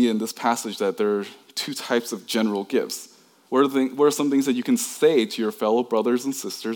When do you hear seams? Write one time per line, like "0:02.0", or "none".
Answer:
0:03.5